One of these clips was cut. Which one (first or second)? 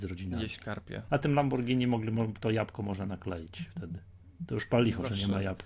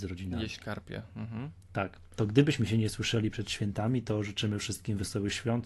first